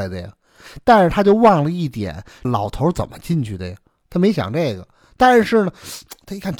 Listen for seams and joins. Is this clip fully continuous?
no; 1 cut; at 2.4 s

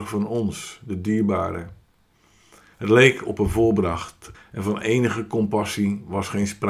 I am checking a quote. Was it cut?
yes; 2 cuts; at 2.7 s, 4.3 s

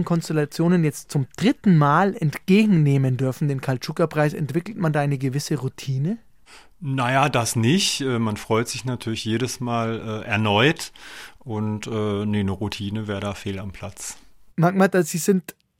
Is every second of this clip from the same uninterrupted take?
yes; 0 cuts

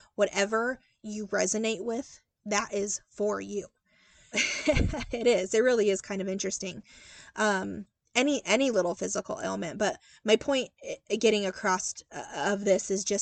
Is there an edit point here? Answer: yes; 1 cut; at 4.3 s

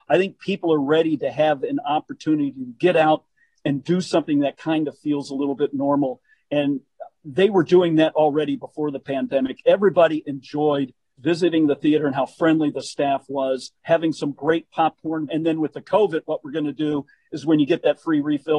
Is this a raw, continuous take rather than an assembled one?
no; 3 cuts; at 11.2 s, 13.8 s, 15.3 s

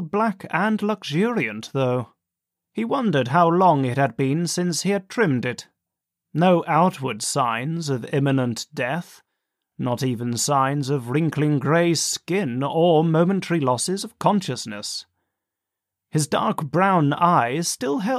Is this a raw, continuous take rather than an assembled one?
no; 1 cut; at 6.2 s

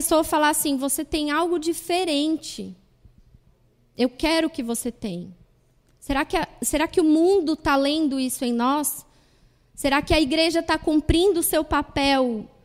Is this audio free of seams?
yes; 0 cuts

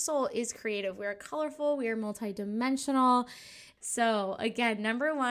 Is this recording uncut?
no; 1 cut; at 3.8 s

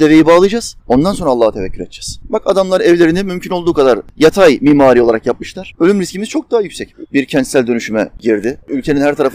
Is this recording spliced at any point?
yes; 2 cuts; at 5.8 s, 7.1 s

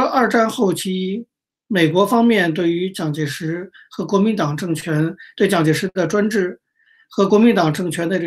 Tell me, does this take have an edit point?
no; 0 cuts

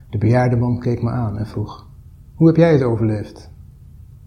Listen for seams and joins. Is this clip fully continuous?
yes; 0 cuts

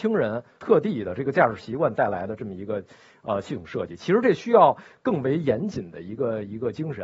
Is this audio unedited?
yes; 0 cuts

